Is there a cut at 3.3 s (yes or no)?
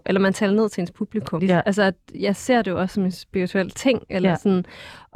no